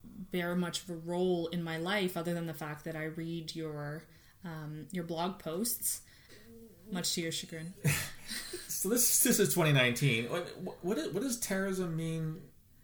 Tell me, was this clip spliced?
yes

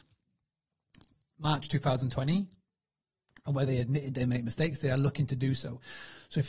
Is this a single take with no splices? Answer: yes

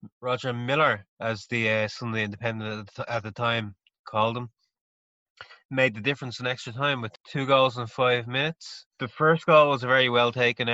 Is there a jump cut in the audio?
no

